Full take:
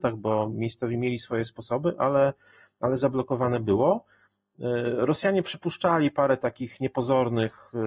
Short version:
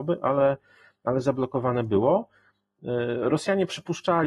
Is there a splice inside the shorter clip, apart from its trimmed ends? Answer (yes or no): no